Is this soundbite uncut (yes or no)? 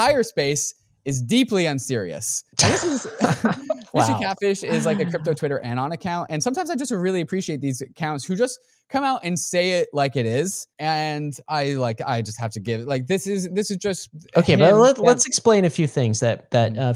no